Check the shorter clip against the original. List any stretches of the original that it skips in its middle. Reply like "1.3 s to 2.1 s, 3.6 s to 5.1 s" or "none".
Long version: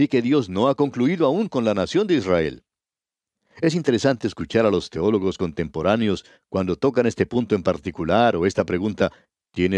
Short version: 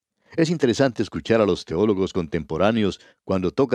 none